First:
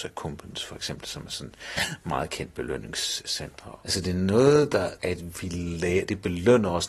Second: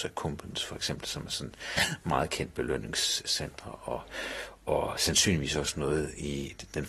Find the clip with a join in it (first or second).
first